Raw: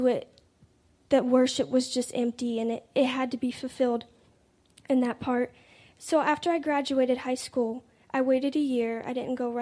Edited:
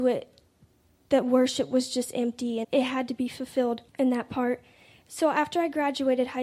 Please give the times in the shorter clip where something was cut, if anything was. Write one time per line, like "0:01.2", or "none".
0:02.6
0:03.9